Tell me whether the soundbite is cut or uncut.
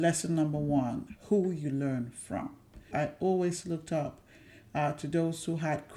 cut